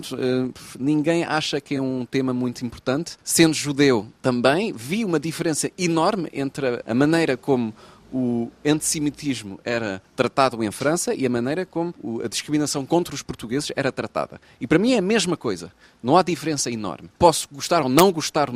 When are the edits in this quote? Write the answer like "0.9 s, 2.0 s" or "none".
none